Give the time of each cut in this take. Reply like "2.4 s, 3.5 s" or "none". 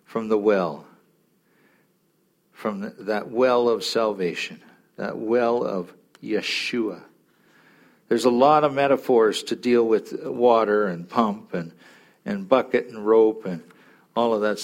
none